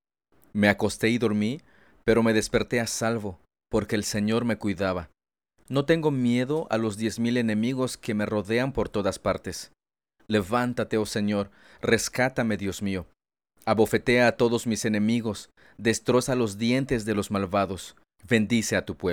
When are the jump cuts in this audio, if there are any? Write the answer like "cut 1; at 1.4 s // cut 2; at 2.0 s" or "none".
cut 1; at 18.2 s